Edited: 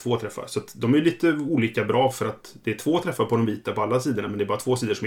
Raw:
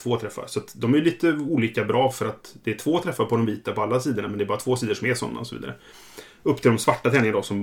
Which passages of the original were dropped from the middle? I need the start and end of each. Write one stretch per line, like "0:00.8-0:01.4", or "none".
none